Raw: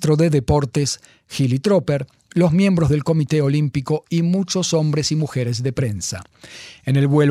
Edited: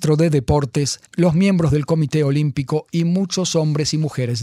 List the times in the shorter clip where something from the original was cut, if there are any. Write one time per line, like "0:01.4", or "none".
0:01.1